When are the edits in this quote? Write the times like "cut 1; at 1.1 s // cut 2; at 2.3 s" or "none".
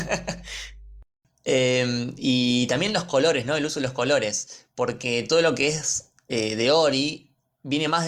none